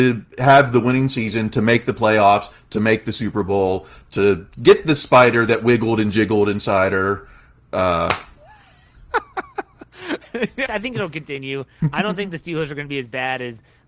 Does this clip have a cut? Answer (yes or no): yes